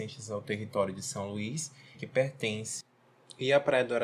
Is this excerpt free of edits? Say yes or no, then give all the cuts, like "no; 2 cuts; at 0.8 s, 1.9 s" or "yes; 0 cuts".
no; 1 cut; at 1.9 s